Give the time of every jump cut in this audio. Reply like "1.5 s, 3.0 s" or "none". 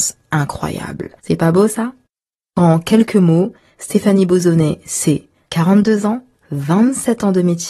1.2 s